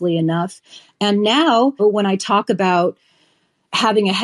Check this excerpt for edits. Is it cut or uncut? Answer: cut